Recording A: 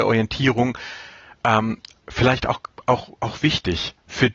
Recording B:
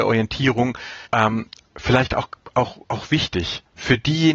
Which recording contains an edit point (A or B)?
B